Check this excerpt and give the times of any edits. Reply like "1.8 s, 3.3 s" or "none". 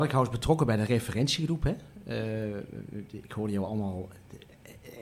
none